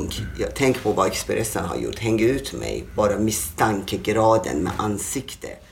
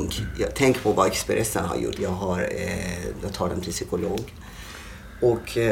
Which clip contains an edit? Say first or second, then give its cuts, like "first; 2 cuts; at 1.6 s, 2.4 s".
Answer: second; 1 cut; at 1.9 s